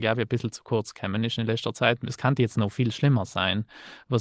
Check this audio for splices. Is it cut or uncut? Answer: uncut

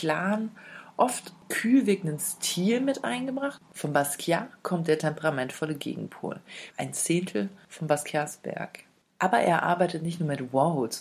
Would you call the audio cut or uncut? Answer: cut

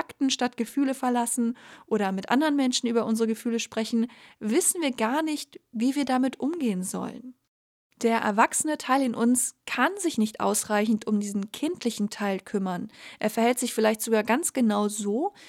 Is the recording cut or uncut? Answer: uncut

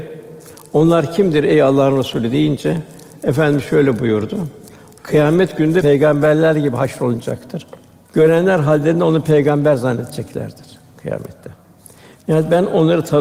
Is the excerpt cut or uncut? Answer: cut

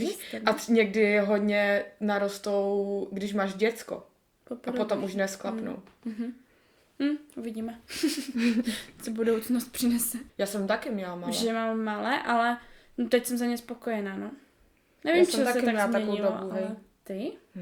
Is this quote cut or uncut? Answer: cut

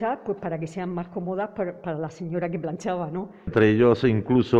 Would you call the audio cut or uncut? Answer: cut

